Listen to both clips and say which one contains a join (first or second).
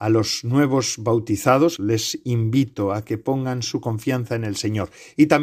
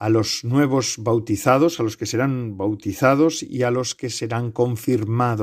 first